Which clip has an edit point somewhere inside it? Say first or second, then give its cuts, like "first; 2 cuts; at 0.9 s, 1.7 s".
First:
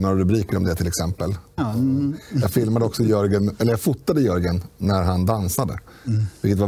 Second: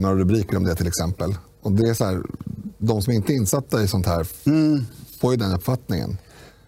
first; 1 cut; at 1.6 s